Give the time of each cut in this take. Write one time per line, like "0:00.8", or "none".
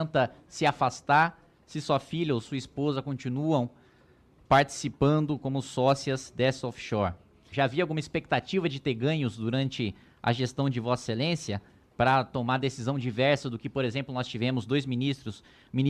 0:07.5